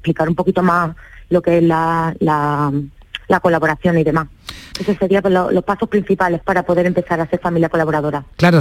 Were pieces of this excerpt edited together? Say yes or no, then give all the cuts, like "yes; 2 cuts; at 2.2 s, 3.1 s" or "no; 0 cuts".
yes; 2 cuts; at 4.7 s, 6.4 s